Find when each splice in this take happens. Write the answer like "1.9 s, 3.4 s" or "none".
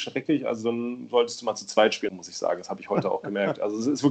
2.1 s